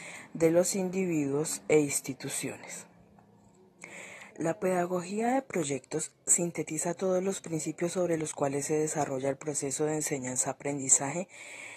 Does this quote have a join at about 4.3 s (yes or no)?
yes